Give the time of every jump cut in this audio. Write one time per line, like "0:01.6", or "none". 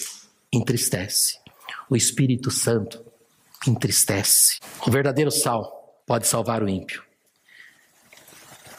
0:04.8
0:06.0